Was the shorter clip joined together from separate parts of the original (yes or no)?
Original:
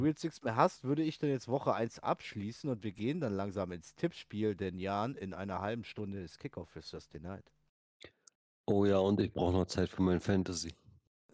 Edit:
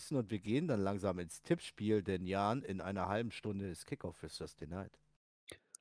no